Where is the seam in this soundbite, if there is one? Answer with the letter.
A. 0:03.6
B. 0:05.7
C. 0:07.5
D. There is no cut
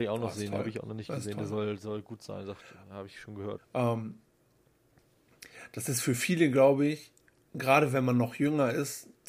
A